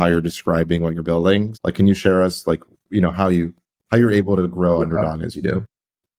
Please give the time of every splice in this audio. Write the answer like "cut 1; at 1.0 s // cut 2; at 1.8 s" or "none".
cut 1; at 1.5 s